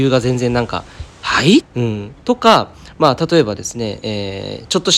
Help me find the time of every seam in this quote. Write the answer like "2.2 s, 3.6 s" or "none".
1.6 s